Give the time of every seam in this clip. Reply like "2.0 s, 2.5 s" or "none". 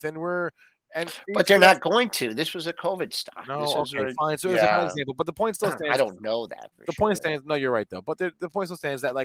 7.2 s